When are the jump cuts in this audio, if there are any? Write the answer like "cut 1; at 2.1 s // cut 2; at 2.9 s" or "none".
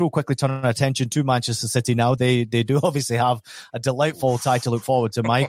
none